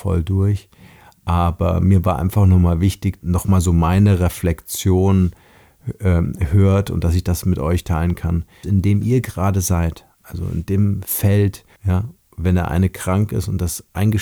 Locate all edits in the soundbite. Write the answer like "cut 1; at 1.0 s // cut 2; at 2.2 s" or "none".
cut 1; at 3.2 s // cut 2; at 8.6 s // cut 3; at 11.8 s